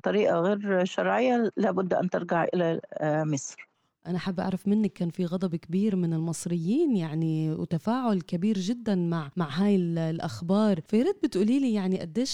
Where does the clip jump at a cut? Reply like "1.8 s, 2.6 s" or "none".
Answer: none